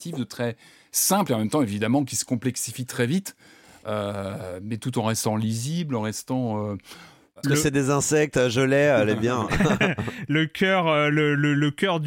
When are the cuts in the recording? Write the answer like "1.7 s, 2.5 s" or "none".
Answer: 7.4 s